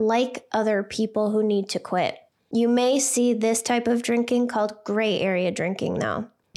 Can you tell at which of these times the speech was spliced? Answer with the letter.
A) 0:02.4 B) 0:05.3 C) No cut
A